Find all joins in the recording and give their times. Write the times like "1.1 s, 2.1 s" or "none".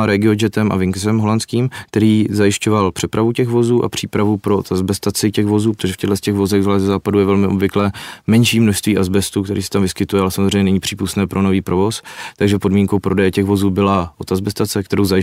none

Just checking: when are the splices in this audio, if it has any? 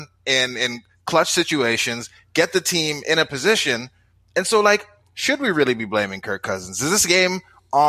none

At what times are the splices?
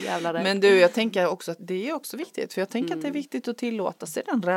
1.6 s

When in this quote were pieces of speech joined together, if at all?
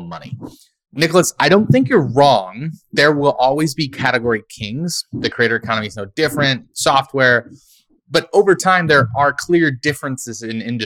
none

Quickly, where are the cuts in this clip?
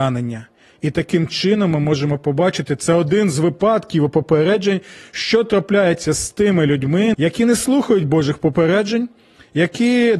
7.1 s

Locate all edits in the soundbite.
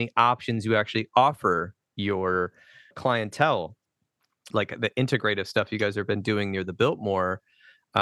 2.9 s, 4.5 s

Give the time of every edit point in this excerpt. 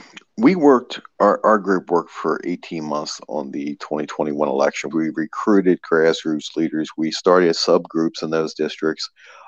4.9 s

